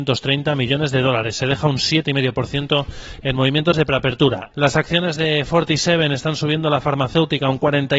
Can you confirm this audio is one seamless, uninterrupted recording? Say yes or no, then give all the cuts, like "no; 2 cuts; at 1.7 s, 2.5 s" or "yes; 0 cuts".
no; 1 cut; at 4.5 s